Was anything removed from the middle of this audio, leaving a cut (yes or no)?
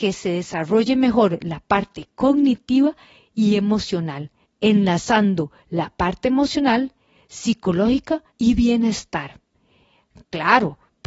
yes